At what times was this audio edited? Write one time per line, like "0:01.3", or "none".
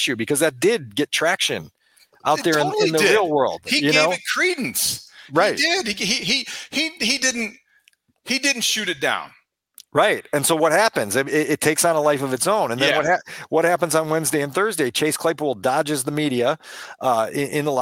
none